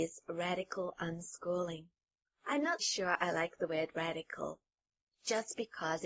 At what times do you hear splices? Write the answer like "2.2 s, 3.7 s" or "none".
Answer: 2.8 s